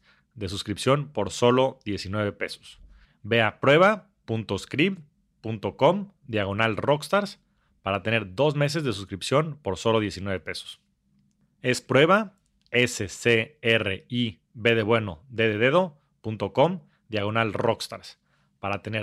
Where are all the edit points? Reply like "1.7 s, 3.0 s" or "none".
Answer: 3.0 s